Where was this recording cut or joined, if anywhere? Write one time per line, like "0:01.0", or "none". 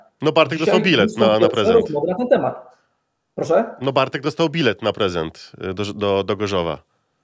none

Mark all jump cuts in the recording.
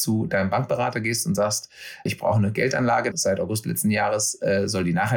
0:02.1
0:03.1

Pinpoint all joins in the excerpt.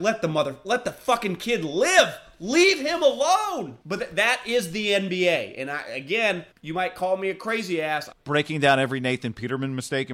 0:03.8
0:06.5
0:08.1

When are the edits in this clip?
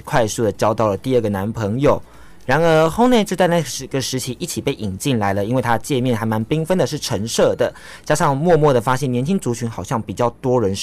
none

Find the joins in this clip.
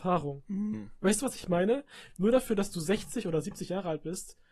none

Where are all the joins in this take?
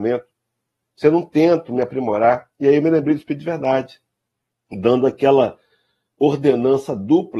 none

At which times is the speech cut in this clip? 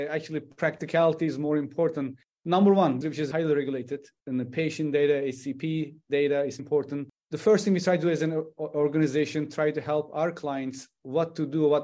0:03.0
0:06.6

